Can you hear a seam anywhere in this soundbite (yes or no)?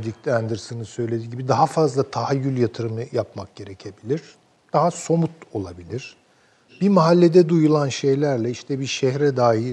no